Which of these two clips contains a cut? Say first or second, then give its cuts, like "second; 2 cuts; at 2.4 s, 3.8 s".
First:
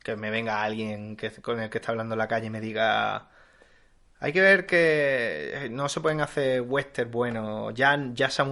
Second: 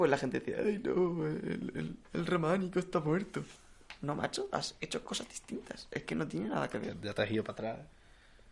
second; 1 cut; at 2.0 s